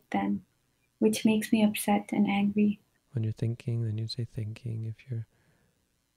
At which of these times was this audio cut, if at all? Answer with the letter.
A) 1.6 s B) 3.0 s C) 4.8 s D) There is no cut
B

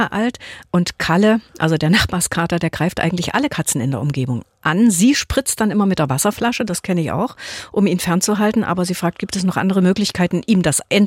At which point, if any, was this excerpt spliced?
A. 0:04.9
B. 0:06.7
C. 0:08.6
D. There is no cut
D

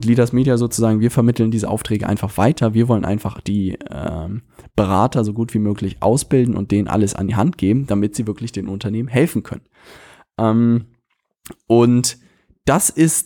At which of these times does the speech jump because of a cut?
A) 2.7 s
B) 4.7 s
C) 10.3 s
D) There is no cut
D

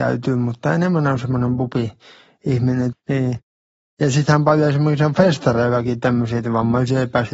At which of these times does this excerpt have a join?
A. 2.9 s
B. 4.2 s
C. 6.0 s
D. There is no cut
A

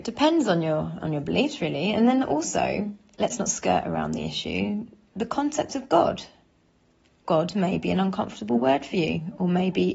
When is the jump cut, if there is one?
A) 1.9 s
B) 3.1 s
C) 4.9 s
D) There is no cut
B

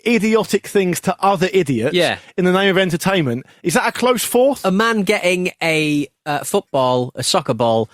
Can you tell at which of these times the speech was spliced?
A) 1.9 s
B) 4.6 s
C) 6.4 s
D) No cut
D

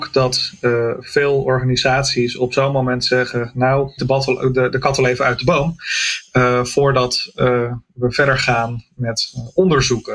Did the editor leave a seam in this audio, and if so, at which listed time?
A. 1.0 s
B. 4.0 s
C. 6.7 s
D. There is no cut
B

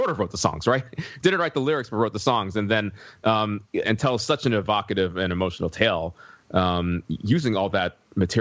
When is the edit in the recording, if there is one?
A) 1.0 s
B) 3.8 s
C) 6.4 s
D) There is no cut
B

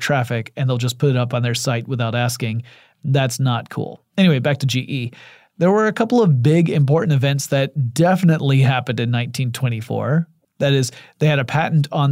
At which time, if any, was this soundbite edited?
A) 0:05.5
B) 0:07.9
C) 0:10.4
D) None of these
C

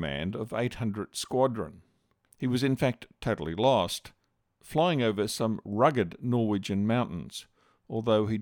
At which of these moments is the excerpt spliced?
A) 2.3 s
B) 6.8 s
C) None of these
A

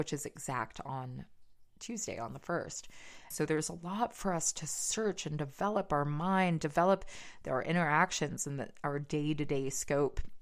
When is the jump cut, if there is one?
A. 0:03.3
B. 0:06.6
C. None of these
A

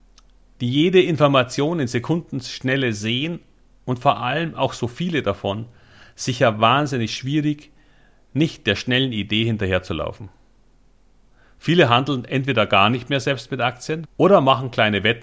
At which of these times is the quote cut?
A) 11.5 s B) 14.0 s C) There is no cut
B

